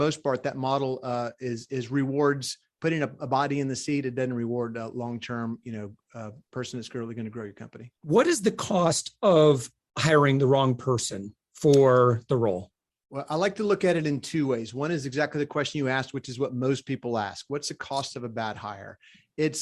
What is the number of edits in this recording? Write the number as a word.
one